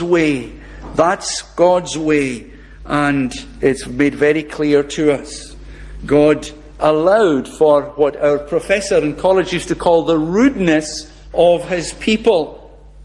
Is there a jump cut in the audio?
no; 0 cuts

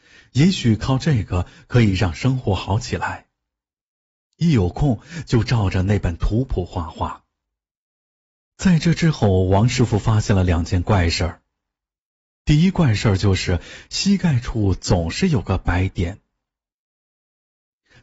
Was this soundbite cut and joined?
no; 0 cuts

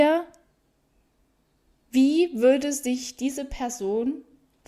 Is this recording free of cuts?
yes; 0 cuts

